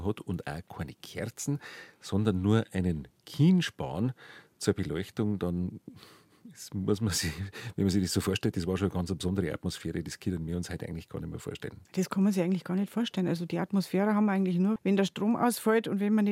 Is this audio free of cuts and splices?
no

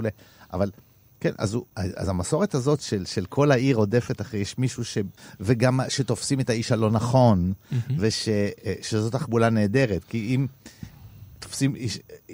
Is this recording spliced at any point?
yes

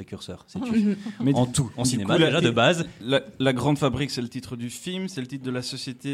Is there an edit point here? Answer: no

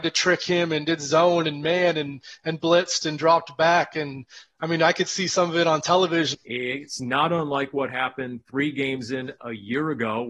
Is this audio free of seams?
no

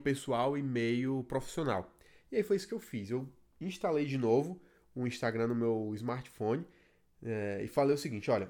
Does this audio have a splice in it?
no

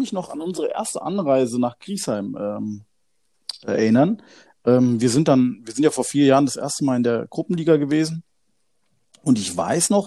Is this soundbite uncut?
yes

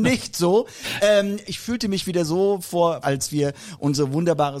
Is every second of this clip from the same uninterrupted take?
no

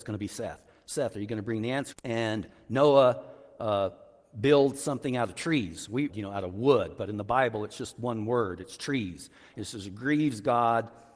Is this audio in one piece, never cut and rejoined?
no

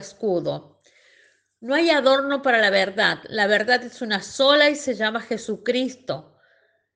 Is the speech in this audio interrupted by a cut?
no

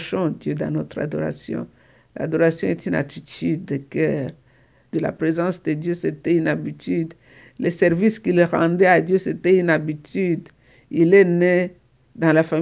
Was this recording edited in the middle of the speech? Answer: yes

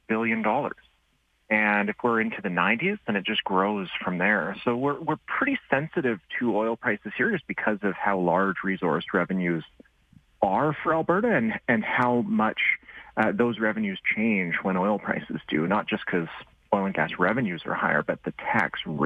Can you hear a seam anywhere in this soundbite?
no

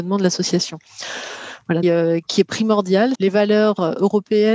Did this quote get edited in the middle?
yes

